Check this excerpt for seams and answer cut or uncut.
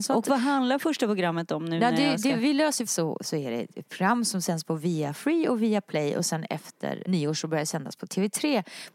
cut